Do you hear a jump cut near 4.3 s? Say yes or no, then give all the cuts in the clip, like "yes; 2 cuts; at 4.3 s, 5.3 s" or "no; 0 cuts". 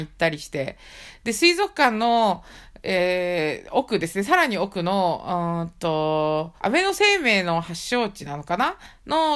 no; 1 cut; at 6.6 s